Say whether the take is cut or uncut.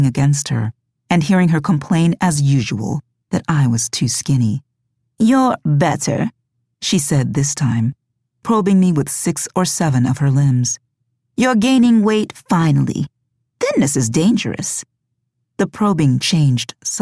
uncut